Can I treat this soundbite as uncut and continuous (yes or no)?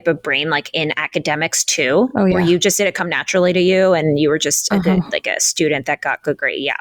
yes